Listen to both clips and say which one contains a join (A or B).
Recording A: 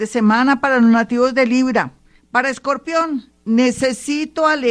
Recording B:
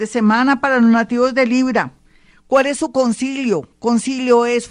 A